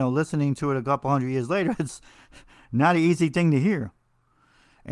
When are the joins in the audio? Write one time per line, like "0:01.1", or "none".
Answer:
none

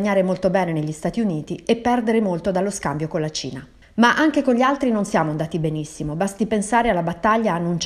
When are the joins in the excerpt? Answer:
0:03.8

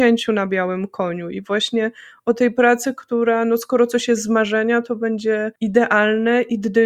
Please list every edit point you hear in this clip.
0:05.6

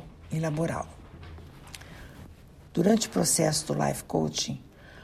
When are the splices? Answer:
0:02.7

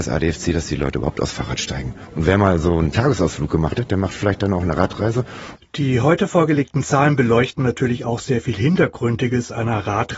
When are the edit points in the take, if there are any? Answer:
0:05.6

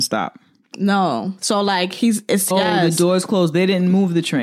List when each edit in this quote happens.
0:02.5

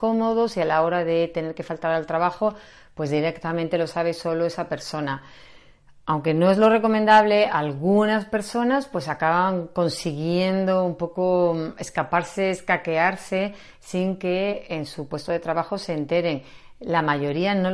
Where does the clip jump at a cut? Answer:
none

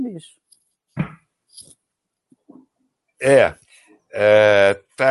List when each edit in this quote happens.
none

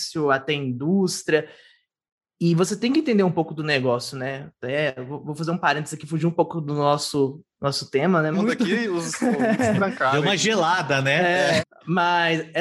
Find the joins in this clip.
0:08.3
0:11.6

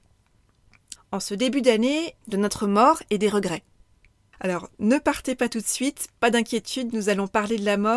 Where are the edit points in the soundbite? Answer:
0:01.0
0:02.2
0:04.3

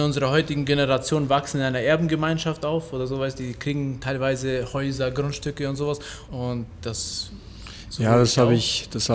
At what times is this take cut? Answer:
0:06.3

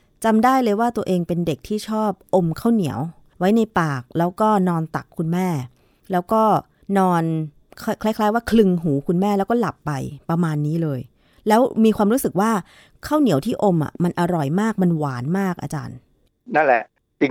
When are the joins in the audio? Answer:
none

